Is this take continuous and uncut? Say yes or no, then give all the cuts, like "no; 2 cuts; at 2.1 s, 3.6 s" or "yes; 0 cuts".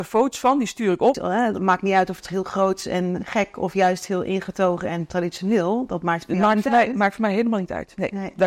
no; 1 cut; at 1.1 s